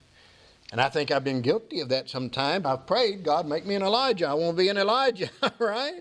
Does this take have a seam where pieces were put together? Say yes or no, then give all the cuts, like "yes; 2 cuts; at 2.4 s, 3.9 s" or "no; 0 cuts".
yes; 1 cut; at 2.6 s